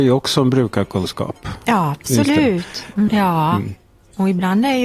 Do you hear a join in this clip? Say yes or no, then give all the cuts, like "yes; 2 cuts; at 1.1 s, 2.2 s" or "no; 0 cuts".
yes; 1 cut; at 3.1 s